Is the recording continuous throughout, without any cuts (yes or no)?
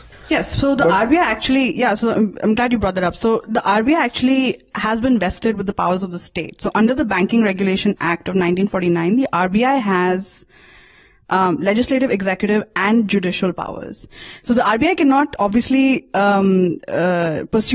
yes